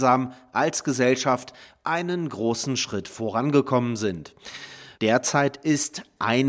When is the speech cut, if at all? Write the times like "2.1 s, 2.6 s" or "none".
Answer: 5.0 s